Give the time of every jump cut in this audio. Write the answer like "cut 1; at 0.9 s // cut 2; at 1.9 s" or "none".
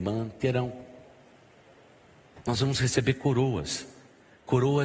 none